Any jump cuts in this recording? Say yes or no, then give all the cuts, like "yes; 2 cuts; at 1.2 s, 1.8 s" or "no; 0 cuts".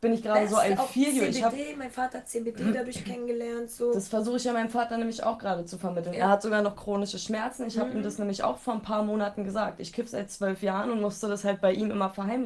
no; 0 cuts